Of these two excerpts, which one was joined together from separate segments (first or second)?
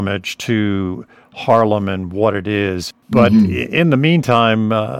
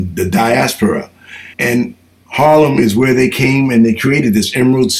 second